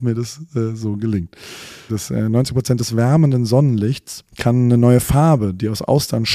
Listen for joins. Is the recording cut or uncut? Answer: cut